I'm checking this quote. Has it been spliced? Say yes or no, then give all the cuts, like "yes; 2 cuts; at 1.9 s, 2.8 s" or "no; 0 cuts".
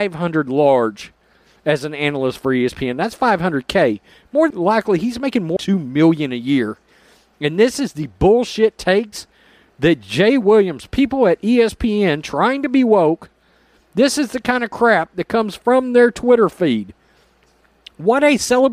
yes; 2 cuts; at 4.5 s, 5.6 s